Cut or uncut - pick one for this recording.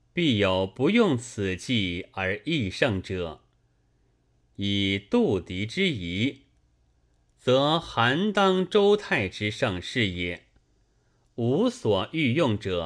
uncut